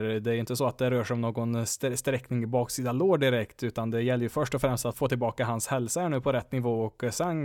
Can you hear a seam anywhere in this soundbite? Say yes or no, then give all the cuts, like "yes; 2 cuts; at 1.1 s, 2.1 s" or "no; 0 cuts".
yes; 1 cut; at 4.9 s